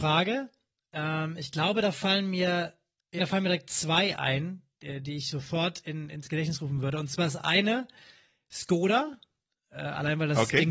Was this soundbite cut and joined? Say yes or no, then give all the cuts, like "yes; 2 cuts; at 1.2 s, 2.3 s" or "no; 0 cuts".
yes; 1 cut; at 3.2 s